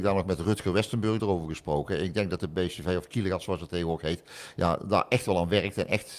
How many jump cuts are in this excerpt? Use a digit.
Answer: 1